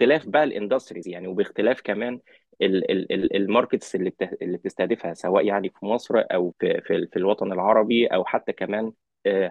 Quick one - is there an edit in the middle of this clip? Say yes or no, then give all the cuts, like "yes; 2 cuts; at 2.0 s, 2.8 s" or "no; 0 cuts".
yes; 1 cut; at 6.5 s